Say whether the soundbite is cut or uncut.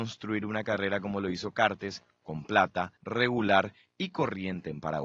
cut